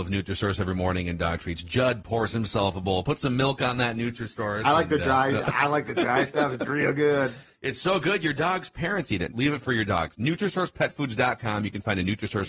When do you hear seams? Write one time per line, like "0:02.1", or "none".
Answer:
0:09.3